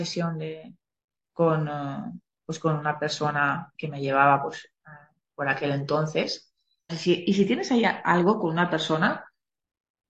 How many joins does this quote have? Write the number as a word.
two